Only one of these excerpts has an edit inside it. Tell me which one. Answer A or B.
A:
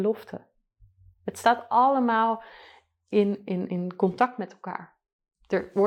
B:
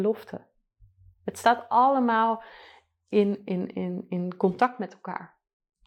A